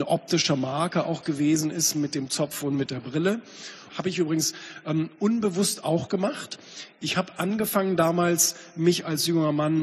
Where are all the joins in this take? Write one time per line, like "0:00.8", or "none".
0:03.9